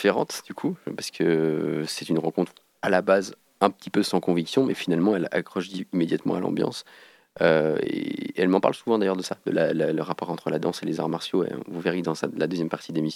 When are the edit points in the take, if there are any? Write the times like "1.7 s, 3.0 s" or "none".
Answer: none